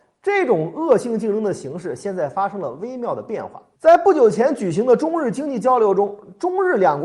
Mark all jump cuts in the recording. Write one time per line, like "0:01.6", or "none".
none